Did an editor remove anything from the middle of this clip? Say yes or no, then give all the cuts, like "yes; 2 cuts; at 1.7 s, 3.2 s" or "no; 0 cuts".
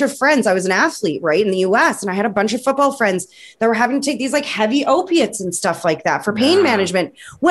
no; 0 cuts